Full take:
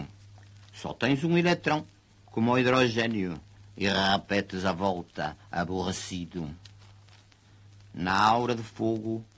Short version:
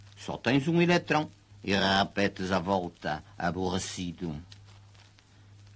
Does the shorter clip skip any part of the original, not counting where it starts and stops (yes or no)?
yes